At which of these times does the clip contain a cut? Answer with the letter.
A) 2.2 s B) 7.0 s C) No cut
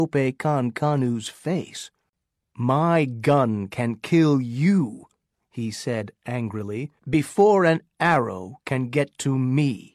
B